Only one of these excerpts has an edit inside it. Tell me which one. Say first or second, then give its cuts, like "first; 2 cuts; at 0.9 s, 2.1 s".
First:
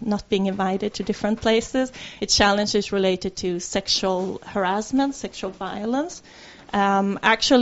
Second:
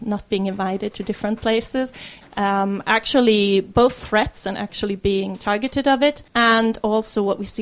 second; 2 cuts; at 2.2 s, 6.3 s